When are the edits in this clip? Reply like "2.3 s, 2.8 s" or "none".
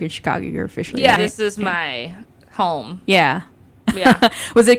1.2 s